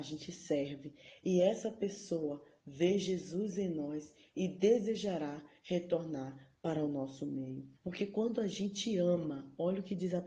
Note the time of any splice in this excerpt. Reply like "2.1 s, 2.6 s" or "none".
7.8 s